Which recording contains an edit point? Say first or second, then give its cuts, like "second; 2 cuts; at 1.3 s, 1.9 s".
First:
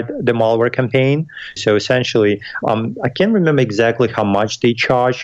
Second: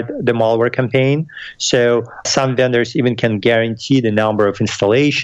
first; 2 cuts; at 1.6 s, 2.6 s